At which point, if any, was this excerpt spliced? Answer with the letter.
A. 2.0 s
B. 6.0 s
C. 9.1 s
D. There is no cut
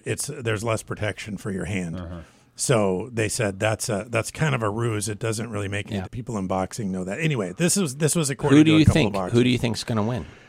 B